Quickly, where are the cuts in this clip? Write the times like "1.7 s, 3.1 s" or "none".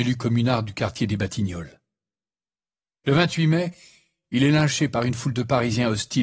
none